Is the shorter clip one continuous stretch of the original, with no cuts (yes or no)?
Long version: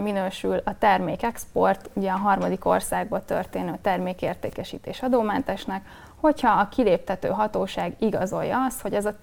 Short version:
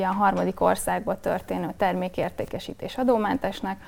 yes